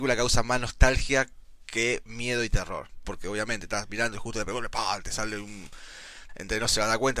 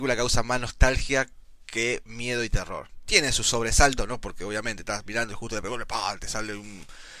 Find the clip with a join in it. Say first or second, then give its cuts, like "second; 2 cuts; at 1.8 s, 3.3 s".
first; 2 cuts; at 3.0 s, 6.3 s